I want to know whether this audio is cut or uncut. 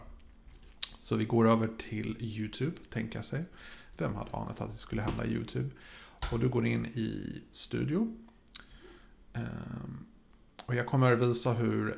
uncut